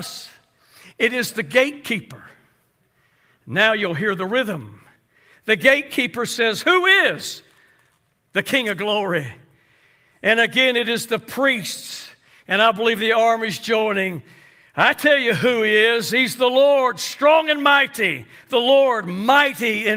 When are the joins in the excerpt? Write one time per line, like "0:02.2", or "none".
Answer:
none